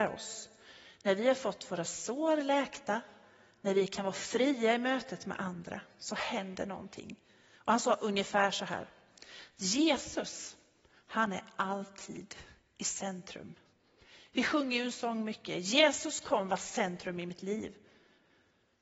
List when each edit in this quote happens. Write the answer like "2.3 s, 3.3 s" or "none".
none